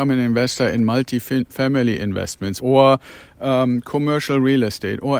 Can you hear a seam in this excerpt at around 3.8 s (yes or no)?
no